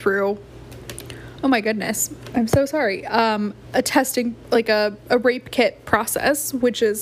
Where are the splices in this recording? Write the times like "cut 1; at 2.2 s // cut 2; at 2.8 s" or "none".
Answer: none